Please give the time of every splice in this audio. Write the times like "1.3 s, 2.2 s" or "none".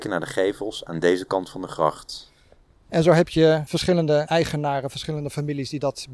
2.9 s